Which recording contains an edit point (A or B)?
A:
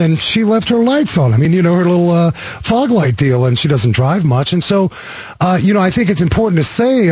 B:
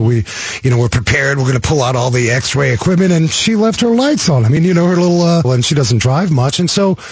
B